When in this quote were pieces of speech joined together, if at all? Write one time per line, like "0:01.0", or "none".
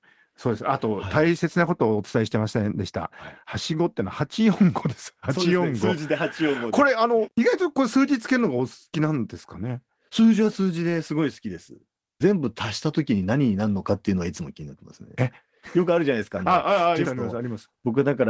0:17.0